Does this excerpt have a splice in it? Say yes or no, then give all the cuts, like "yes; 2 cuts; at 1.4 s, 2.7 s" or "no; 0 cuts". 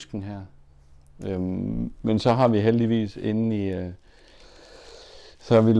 no; 0 cuts